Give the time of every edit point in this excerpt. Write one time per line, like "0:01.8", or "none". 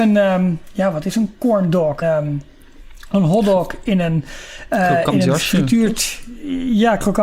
0:02.0